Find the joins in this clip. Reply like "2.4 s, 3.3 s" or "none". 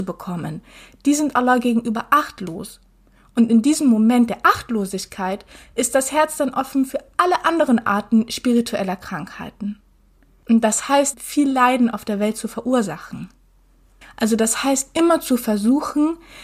11.1 s, 14.0 s